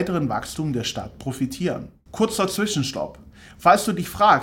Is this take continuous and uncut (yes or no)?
no